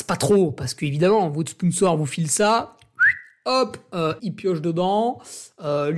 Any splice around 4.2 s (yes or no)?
yes